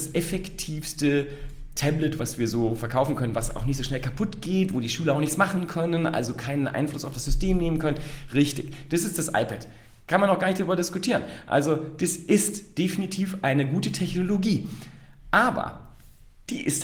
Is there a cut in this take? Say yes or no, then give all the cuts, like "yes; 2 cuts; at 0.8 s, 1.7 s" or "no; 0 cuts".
no; 0 cuts